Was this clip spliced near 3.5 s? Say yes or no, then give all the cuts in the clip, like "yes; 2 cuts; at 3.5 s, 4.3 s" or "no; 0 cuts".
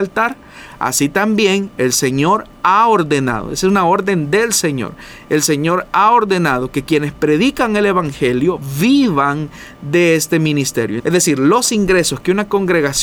no; 1 cut; at 11.0 s